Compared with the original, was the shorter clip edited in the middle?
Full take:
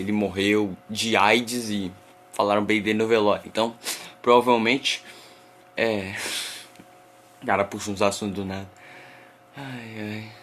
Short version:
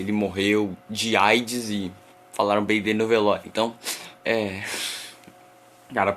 yes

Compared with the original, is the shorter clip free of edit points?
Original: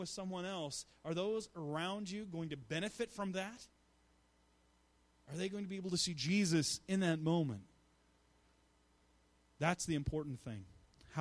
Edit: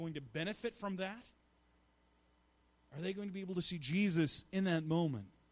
yes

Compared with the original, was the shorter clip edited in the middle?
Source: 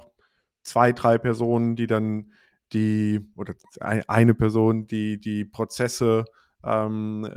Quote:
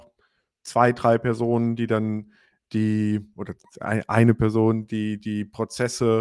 no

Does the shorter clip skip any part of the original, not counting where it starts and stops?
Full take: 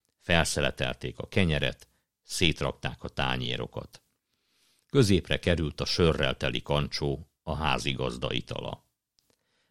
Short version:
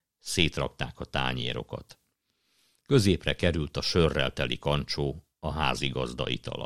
no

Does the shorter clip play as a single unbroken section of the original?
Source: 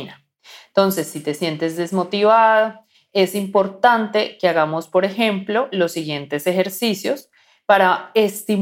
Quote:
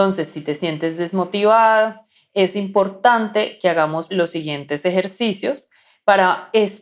no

